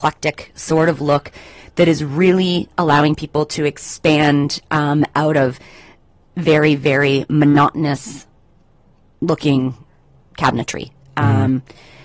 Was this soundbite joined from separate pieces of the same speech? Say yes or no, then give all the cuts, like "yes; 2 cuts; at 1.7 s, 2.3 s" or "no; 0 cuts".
no; 0 cuts